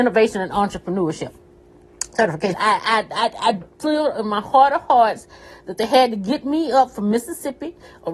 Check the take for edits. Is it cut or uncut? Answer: cut